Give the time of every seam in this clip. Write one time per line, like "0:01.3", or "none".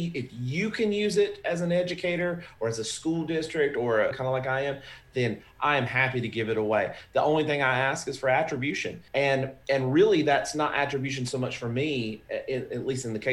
0:04.1
0:09.1

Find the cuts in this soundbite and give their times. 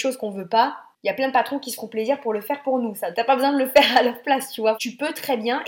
0:03.1
0:04.7

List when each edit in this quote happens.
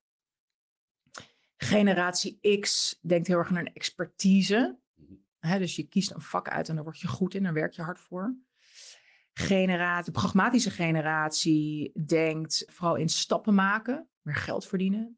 0:12.7
0:14.1

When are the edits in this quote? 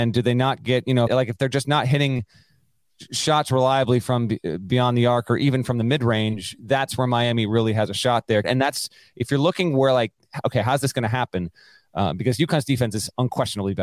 0:01.1
0:08.4

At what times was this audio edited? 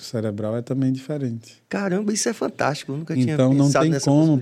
none

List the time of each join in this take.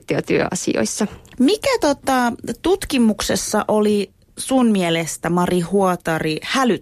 none

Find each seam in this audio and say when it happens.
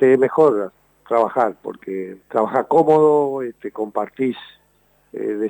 0:02.2

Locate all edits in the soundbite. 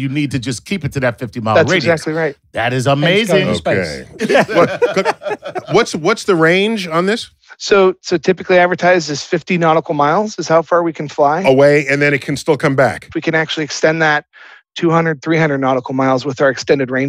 0:04.2
0:13.1

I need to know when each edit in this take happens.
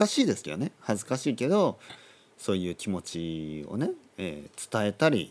none

